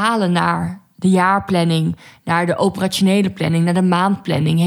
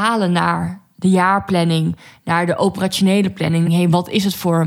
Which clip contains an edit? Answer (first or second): second